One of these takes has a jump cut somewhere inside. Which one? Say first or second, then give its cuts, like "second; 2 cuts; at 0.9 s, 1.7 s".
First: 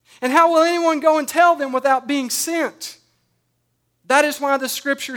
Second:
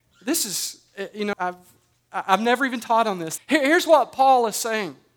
second; 2 cuts; at 1.3 s, 3.4 s